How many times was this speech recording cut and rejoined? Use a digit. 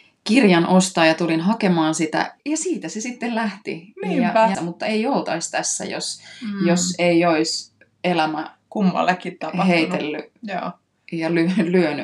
2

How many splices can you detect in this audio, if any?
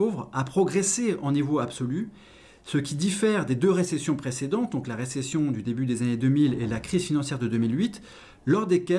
0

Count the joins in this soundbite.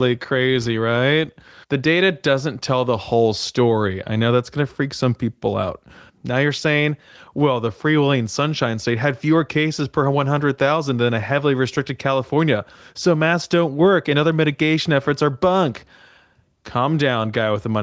2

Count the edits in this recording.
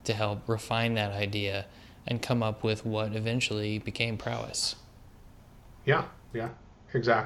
0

